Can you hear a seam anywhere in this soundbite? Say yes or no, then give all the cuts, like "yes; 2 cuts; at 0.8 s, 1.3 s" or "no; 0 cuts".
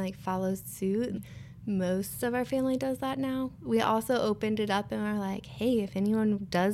yes; 1 cut; at 1.2 s